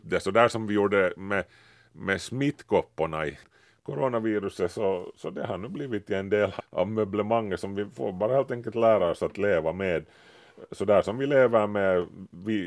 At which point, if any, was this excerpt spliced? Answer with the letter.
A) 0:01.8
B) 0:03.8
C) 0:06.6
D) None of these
C